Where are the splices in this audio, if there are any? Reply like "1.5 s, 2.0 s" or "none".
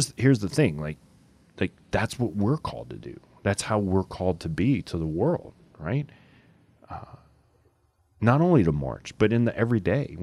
none